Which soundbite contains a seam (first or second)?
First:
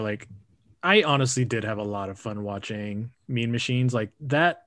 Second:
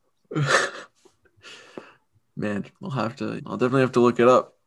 second